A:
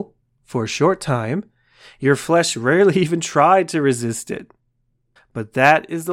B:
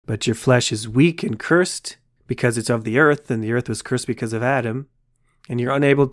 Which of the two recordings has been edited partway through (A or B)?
A